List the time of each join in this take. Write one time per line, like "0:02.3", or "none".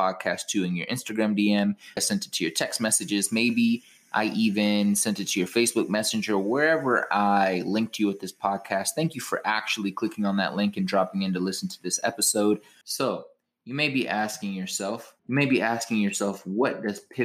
0:02.0
0:12.8
0:15.2